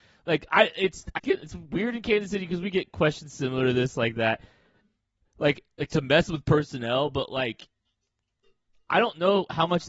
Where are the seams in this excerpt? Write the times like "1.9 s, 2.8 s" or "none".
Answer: 1.2 s